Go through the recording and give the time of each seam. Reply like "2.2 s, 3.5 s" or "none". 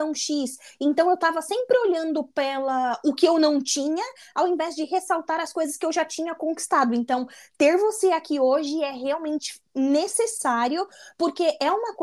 none